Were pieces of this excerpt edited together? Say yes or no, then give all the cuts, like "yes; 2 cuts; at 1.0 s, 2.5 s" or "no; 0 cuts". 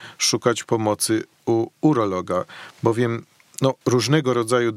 yes; 1 cut; at 3.8 s